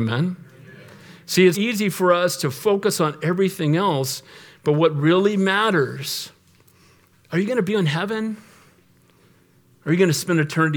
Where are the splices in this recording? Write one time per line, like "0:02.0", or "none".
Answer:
0:01.5